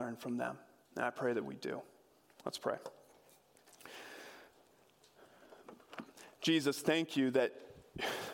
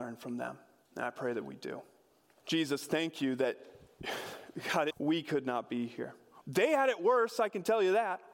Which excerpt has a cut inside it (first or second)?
second